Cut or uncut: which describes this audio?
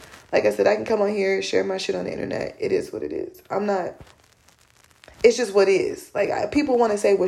uncut